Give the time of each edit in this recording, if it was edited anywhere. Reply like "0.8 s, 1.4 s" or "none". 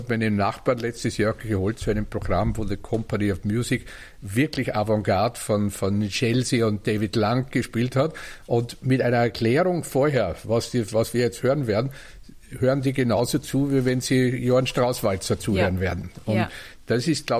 none